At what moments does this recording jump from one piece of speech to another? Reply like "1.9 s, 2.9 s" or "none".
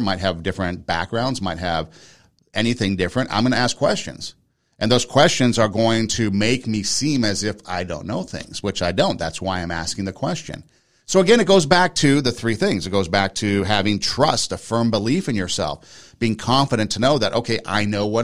none